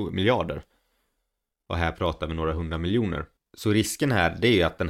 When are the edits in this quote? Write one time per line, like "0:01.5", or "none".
0:03.4